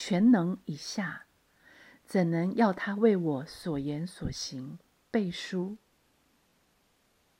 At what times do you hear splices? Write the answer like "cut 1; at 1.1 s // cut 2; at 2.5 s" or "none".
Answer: none